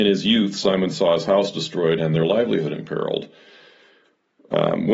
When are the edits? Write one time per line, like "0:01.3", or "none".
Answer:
0:02.0